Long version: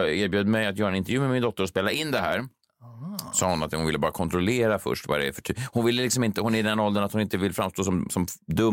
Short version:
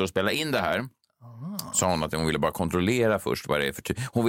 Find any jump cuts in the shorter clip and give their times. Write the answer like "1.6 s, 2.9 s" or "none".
none